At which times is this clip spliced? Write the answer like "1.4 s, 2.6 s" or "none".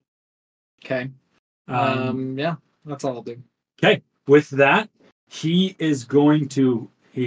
none